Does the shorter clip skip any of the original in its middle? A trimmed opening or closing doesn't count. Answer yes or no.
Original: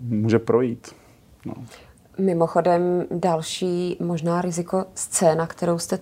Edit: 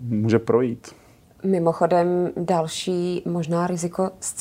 yes